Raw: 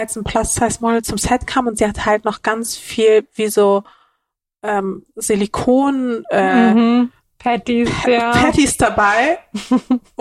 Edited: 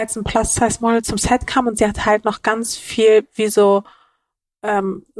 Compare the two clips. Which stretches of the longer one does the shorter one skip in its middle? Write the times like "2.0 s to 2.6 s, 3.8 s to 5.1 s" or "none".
none

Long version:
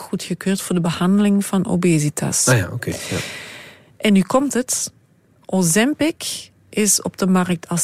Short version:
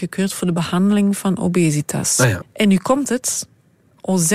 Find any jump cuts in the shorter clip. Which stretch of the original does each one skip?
2.7 s to 3.9 s

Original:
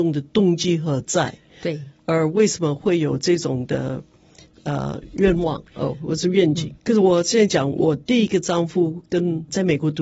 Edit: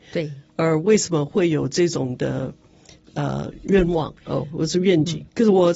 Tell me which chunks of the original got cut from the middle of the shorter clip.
none

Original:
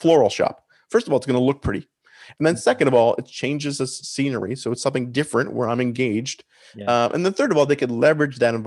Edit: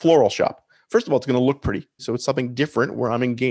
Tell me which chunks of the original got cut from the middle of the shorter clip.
2.0 s to 4.6 s

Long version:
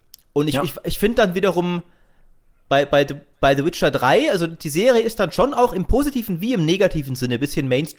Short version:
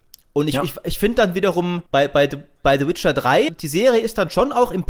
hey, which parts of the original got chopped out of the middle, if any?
1.9 s to 2.6 s, 4.3 s to 4.5 s

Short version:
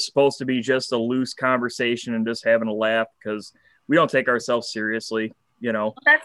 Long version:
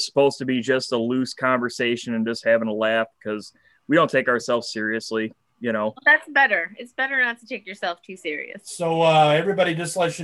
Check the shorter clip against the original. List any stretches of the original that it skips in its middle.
none

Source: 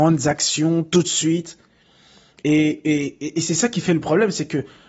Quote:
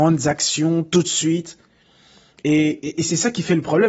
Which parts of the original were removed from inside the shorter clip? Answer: 2.8 s to 3.2 s

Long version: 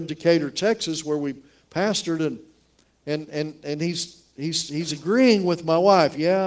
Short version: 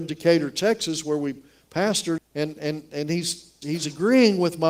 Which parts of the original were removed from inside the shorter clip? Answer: 2.2 s to 2.9 s, 4.3 s to 4.7 s

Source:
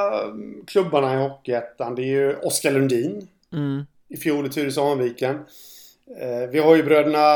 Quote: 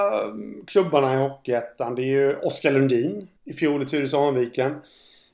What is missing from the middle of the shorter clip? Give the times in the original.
3.4 s to 4.0 s

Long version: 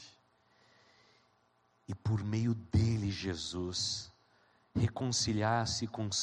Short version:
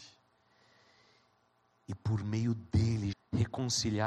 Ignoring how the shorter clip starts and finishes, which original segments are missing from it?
3.1 s to 4.6 s

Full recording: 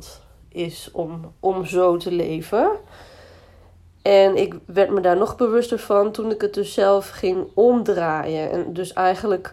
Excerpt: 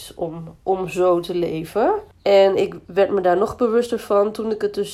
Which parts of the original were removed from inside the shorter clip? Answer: 2.9 s to 3.9 s

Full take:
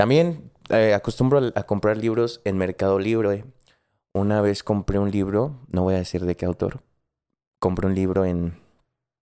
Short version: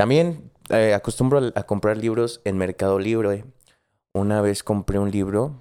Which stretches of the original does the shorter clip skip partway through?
none

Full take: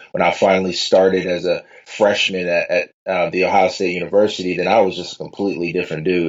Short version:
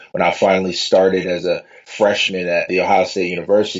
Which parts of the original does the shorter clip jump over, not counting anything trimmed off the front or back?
2.7 s to 3.3 s

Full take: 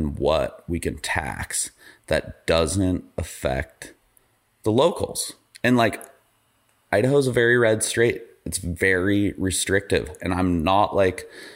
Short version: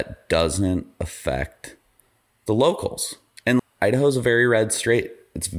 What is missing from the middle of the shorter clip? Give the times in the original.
5.8 s to 6.7 s

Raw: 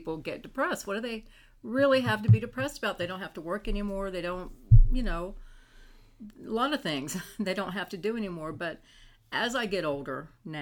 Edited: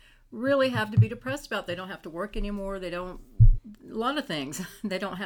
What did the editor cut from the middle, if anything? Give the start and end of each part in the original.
4.9 s to 6.1 s

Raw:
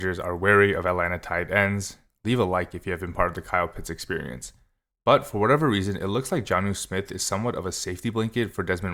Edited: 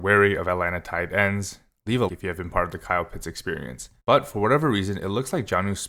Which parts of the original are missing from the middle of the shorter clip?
2.5 s to 2.7 s, 4.6 s to 5.0 s

